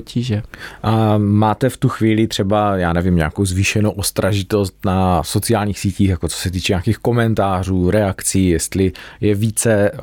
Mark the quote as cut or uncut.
uncut